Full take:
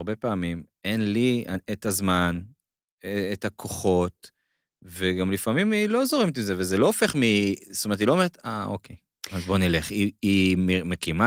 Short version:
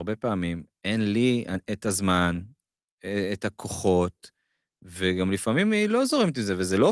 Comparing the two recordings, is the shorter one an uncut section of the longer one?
yes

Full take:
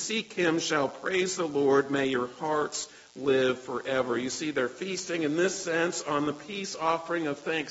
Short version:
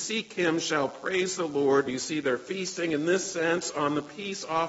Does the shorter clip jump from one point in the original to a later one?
yes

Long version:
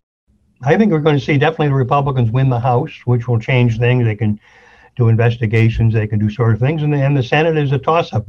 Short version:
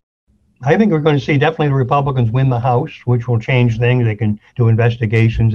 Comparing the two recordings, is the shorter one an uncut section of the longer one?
no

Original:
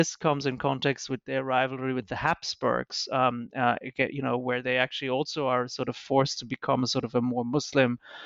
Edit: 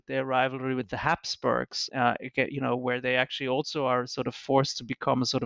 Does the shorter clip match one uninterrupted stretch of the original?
no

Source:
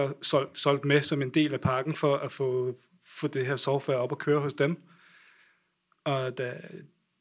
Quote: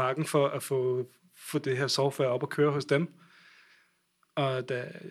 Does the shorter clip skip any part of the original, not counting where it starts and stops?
no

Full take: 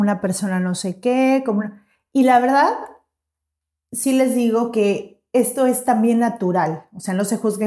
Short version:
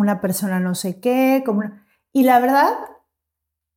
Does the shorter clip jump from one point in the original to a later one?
no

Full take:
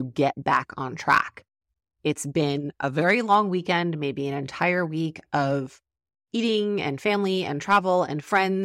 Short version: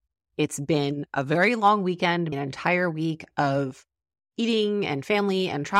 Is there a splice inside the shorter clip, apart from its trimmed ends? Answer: yes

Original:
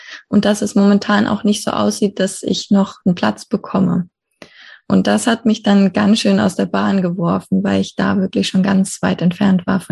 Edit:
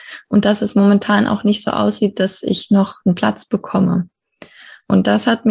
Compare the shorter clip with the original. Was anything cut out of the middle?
no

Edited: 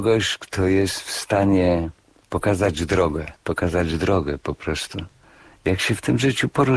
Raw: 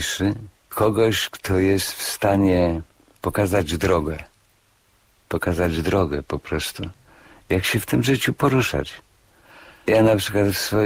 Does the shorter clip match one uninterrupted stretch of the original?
no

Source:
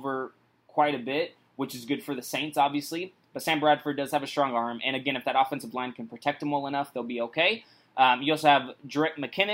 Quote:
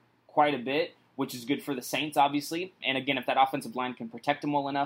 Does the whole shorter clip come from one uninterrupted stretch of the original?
no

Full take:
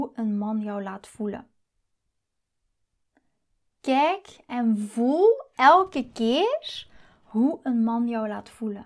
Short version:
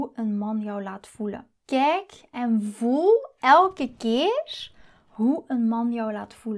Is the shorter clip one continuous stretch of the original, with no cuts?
no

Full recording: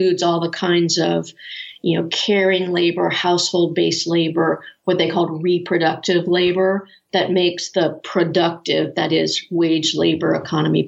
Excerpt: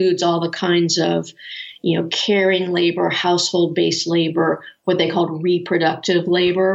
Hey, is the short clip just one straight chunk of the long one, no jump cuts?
yes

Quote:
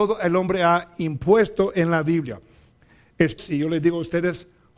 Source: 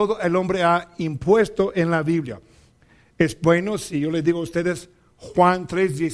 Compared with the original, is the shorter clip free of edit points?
no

